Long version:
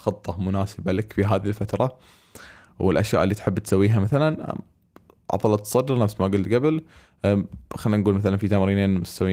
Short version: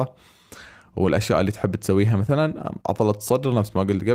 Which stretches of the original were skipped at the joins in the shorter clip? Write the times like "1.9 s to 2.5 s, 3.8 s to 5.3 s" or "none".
4.6 s to 5.3 s

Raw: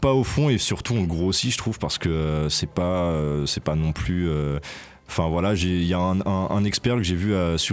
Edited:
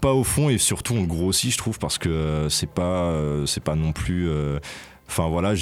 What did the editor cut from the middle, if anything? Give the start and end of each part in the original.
none

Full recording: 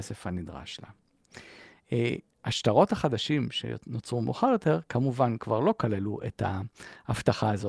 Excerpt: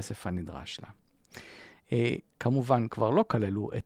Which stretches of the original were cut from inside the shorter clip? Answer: 2.4 s to 4.9 s

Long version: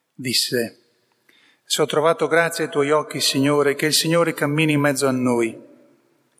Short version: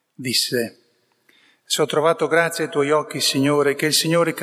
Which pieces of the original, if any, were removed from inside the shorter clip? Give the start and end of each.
none

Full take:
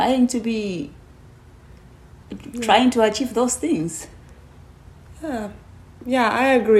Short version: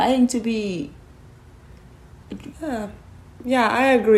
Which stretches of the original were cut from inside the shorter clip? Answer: 2.5 s to 5.1 s

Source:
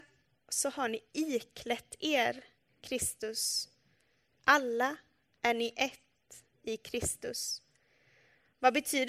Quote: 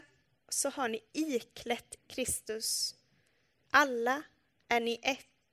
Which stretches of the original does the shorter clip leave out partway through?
2.0 s to 2.7 s

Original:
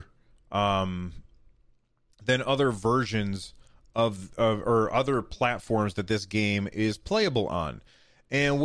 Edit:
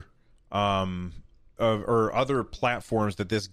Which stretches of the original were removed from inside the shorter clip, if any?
1.6 s to 4.4 s

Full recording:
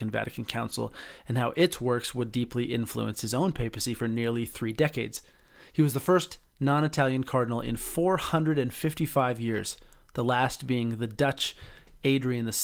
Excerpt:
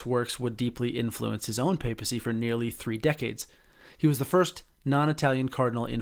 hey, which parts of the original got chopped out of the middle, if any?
none

